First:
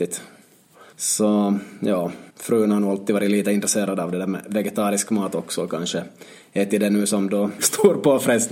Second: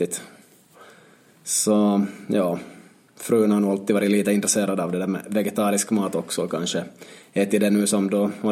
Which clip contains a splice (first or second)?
first